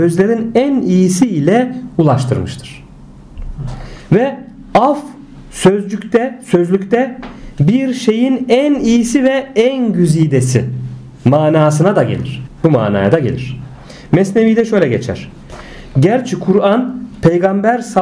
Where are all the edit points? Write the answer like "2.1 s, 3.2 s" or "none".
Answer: 12.5 s